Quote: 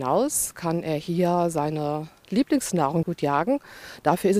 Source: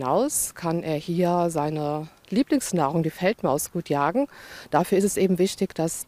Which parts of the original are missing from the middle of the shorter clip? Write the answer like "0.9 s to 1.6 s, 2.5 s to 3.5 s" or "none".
3.0 s to 3.7 s